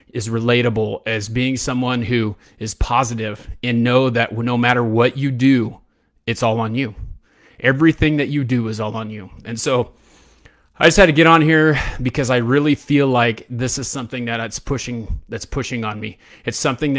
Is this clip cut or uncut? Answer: uncut